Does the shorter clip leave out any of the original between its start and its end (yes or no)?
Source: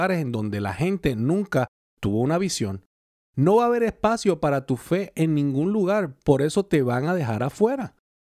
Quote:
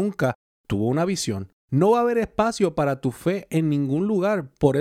yes